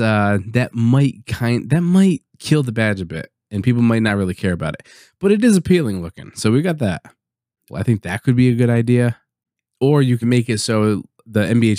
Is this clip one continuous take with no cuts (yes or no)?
no